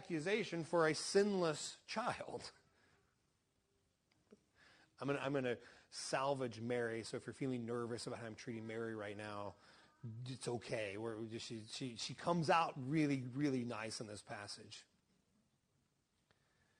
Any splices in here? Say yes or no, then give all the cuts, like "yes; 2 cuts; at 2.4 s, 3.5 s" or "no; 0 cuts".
no; 0 cuts